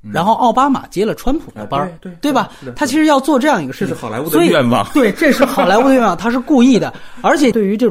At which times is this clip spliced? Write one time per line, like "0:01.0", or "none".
none